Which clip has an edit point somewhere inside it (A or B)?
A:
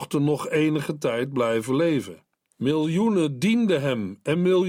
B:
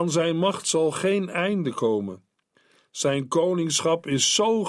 A